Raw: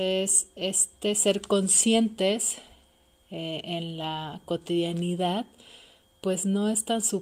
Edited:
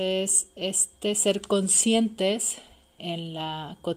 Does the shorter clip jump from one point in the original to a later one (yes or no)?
yes